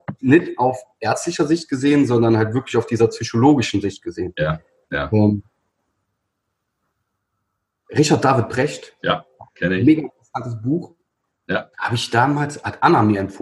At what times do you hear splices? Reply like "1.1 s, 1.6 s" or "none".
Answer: 9.0 s, 11.7 s